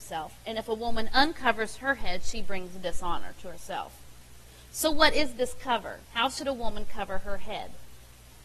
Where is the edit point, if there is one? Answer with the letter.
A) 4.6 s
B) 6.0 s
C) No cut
B